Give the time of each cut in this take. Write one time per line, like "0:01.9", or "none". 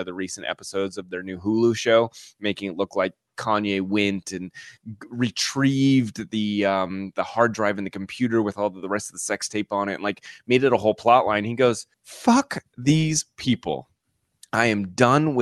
0:11.9